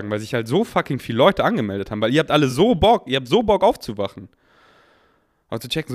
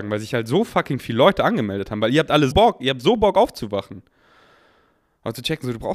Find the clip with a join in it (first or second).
second